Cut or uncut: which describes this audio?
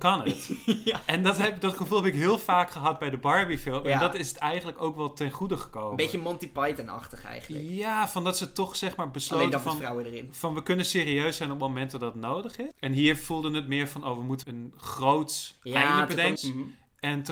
cut